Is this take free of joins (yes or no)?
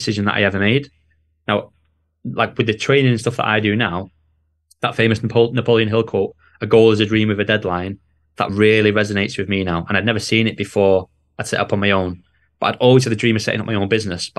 yes